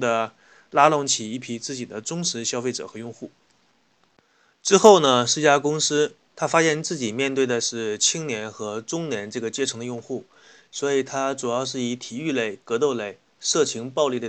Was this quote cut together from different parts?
no; 0 cuts

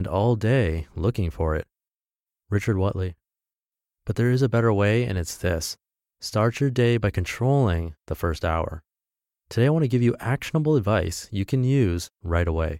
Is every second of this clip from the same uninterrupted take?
yes; 0 cuts

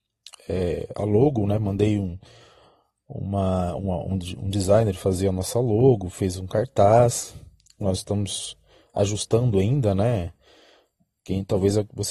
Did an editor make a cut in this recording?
no; 0 cuts

